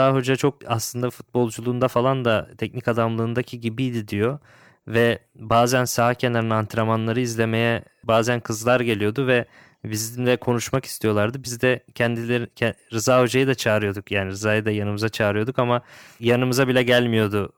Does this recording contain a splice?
no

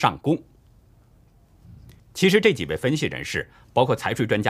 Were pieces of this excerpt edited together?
yes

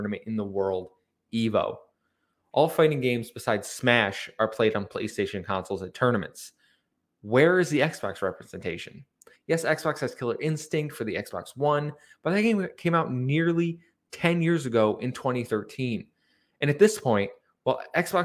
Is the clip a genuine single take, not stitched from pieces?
no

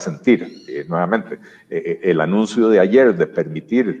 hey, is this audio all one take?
yes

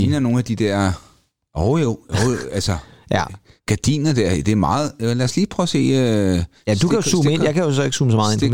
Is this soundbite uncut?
yes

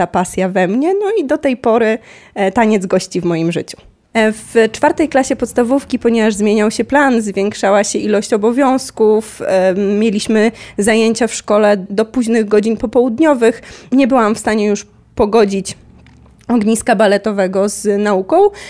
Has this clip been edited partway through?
no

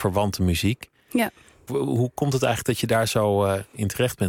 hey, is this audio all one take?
no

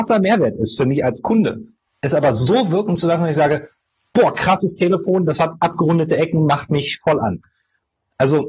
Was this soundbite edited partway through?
no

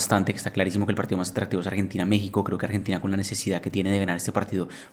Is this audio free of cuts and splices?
yes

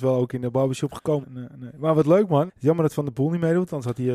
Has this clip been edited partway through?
yes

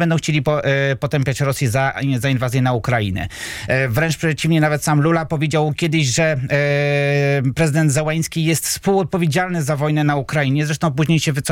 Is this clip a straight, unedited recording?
yes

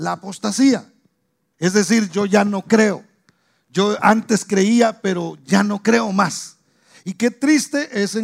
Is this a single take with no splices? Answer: no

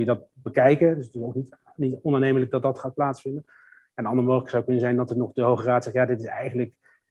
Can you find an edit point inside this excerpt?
no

